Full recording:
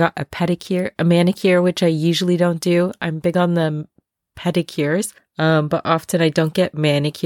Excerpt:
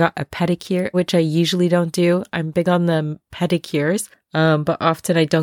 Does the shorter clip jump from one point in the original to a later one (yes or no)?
yes